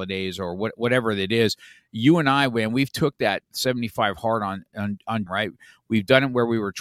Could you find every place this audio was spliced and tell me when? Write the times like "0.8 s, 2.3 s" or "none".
5.3 s